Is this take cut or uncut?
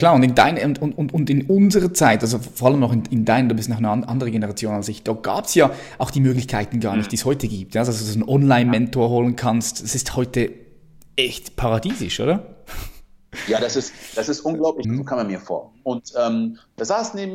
cut